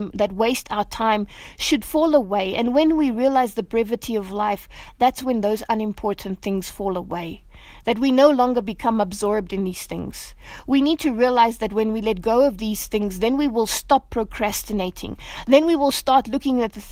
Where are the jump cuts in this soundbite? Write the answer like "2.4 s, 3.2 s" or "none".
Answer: none